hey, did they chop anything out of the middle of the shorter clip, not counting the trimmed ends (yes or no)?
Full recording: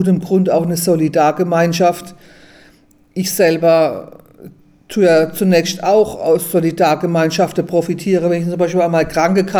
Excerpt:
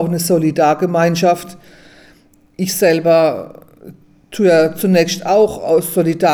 no